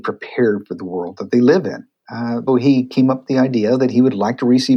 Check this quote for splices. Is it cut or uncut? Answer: cut